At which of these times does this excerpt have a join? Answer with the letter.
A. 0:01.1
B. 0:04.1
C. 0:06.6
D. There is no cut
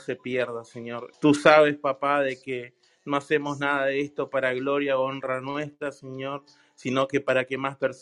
A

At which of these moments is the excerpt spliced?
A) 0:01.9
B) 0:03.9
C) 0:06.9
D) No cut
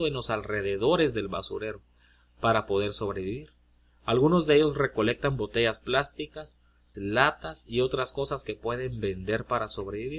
C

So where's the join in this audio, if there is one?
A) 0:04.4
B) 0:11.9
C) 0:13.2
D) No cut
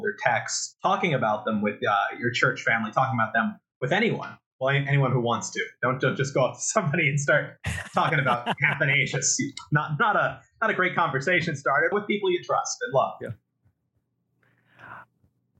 B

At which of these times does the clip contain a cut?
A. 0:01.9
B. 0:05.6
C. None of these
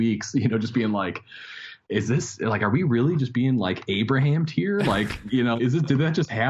B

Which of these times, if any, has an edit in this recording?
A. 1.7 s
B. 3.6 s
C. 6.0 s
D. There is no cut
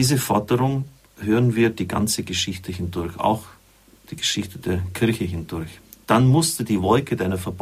C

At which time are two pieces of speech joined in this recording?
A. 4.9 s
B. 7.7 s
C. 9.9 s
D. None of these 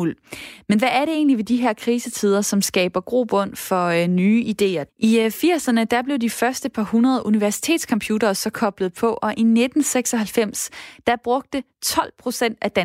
A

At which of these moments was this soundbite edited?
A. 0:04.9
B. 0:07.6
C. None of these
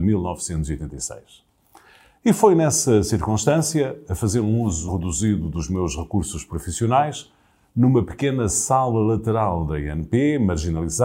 A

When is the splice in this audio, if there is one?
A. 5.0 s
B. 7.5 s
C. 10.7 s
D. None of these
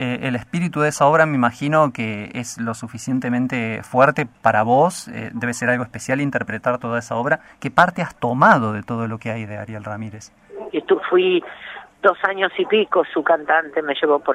C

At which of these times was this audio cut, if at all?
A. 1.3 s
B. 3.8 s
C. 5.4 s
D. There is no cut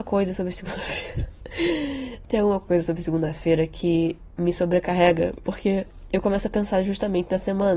C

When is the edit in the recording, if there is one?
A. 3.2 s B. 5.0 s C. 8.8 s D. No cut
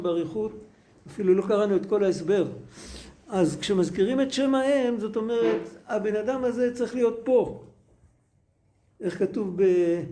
D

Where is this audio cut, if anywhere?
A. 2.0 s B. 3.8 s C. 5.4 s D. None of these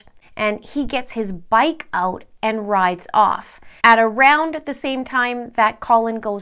B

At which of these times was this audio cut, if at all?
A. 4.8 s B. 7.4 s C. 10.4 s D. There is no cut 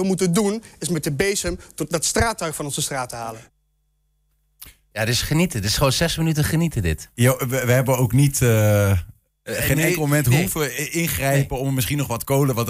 D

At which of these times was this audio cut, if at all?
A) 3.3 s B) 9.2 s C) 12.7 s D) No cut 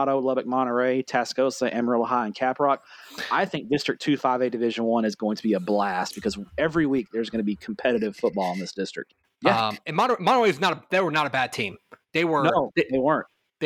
B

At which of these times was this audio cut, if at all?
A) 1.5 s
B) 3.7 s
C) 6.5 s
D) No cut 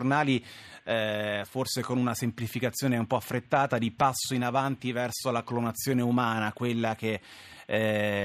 D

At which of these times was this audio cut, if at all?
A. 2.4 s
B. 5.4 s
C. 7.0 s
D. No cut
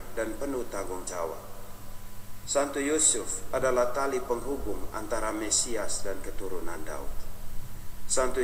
A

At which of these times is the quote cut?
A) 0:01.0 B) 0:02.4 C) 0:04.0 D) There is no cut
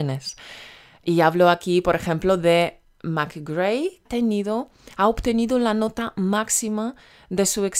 C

